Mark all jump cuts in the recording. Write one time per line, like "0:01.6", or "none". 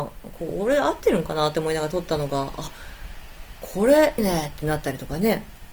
0:04.2